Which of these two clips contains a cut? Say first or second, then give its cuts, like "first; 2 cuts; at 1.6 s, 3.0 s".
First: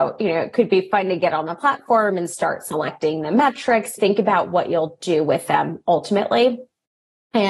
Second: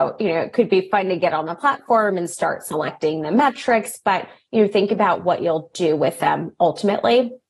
first; 1 cut; at 4.0 s